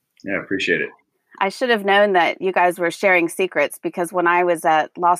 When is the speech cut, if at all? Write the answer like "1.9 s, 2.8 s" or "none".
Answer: none